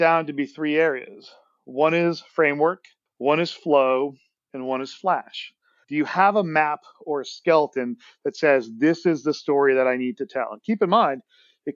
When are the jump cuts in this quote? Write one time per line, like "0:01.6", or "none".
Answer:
0:05.8